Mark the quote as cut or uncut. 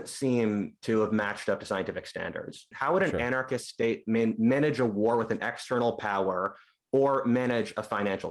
cut